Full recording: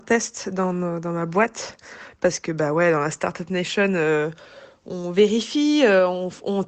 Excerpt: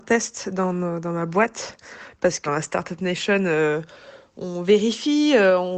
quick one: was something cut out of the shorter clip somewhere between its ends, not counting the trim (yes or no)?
yes